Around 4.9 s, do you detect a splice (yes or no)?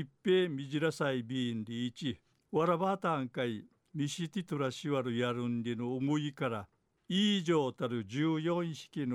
no